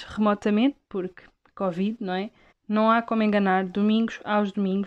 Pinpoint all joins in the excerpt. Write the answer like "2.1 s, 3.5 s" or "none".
2.5 s